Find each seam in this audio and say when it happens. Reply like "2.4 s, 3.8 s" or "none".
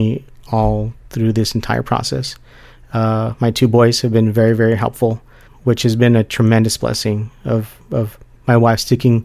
5.5 s